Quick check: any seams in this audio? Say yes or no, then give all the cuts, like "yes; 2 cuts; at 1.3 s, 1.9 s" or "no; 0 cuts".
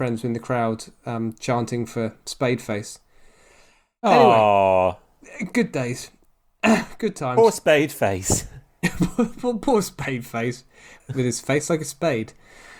no; 0 cuts